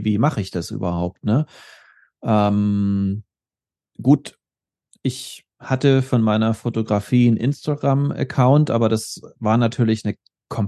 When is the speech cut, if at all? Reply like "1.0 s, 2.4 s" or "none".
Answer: none